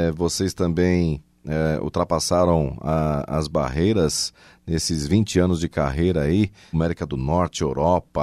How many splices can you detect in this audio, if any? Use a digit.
1